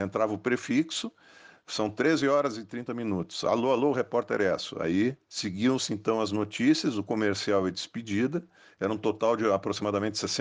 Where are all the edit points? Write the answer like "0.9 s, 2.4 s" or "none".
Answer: none